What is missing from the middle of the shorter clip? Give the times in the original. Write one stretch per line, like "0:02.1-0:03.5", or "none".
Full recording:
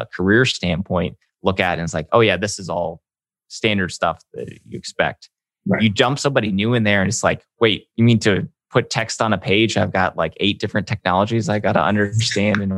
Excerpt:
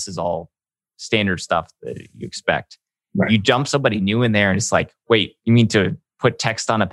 none